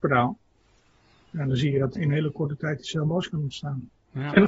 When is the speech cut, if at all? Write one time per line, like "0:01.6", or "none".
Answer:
0:02.0